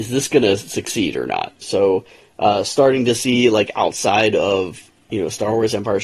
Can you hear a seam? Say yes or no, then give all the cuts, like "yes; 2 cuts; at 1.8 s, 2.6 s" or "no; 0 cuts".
yes; 1 cut; at 1.6 s